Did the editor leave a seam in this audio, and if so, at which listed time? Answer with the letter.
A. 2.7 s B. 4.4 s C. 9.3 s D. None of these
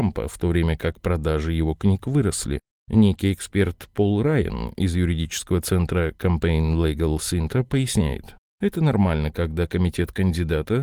D